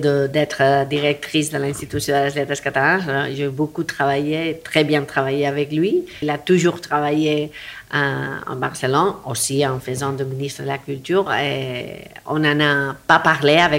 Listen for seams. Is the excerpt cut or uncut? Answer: cut